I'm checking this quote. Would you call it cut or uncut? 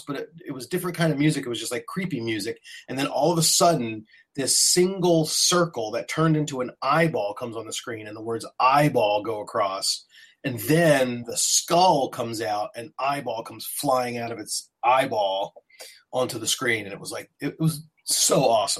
uncut